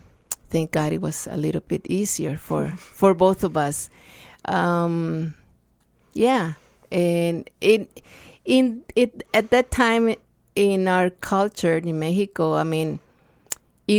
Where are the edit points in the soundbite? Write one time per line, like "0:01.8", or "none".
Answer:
none